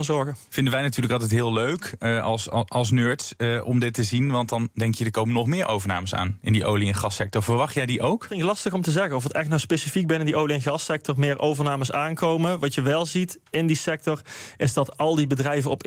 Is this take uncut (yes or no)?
yes